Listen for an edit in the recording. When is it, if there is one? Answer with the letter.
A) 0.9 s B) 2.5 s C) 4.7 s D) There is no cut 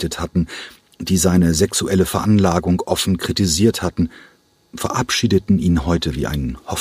D